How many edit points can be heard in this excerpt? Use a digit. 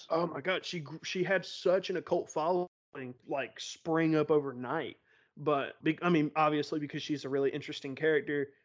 2